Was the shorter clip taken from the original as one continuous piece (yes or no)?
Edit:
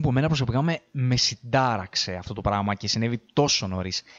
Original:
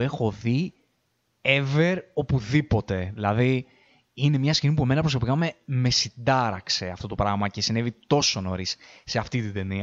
yes